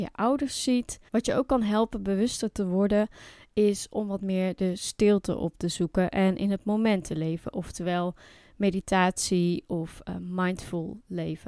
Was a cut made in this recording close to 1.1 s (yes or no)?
yes